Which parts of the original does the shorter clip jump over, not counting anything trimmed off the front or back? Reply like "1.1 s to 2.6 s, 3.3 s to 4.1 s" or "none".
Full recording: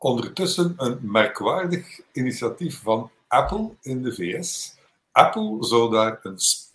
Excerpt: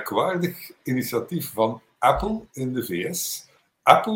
none